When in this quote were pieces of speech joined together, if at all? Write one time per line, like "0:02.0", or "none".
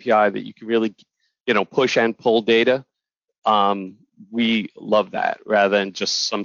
none